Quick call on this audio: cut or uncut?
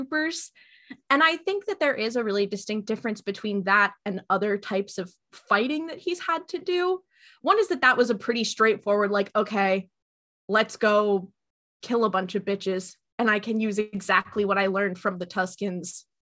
uncut